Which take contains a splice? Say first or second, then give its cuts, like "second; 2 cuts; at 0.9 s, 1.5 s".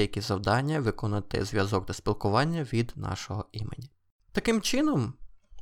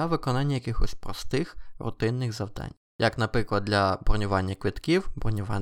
second; 1 cut; at 2.8 s